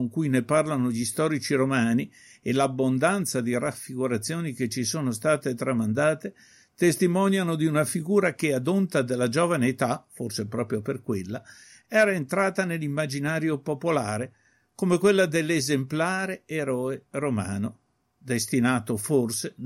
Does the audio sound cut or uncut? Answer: uncut